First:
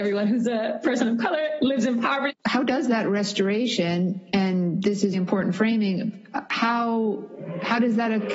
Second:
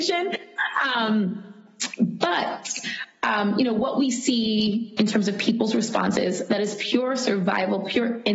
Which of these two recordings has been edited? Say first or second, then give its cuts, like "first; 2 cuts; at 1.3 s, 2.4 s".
first; 2 cuts; at 2.3 s, 5.1 s